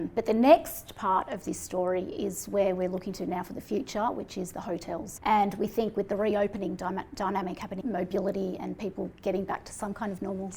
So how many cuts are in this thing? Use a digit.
2